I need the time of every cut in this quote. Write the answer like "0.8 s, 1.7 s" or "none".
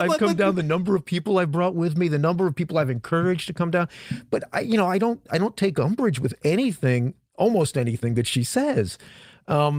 none

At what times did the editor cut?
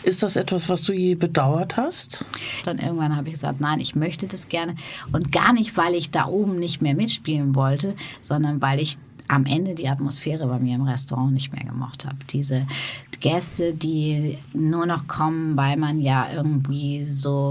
2.6 s

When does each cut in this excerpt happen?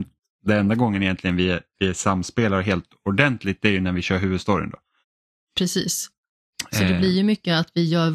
none

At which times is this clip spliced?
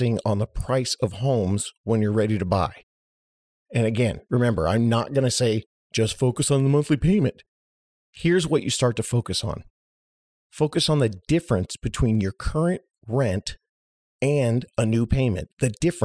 none

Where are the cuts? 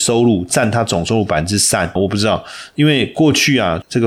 2.0 s

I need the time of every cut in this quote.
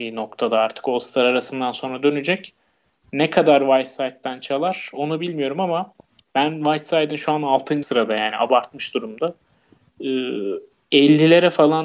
none

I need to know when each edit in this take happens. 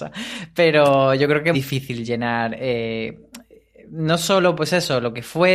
1.5 s

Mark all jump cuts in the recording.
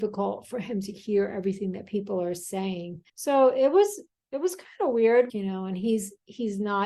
3.1 s, 5.3 s

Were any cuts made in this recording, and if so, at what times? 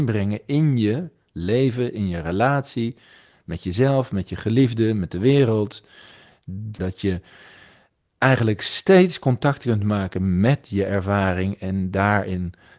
1.9 s, 6.8 s

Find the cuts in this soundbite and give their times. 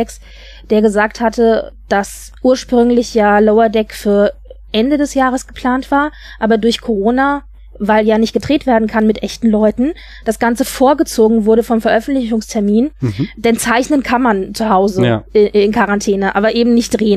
2.4 s

